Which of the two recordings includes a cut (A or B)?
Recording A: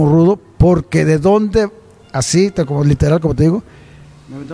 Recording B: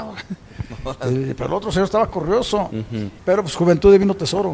B